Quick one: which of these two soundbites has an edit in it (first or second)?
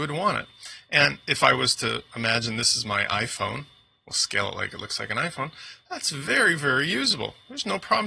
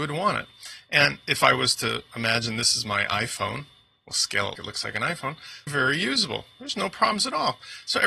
second